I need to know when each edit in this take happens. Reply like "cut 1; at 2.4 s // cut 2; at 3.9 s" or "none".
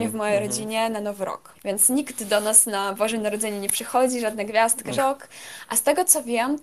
cut 1; at 1.5 s // cut 2; at 5.0 s